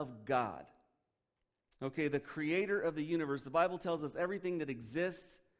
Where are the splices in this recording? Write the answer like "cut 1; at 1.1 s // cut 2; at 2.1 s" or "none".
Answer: none